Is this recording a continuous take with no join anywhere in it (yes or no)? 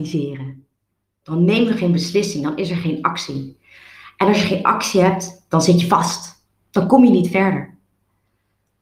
no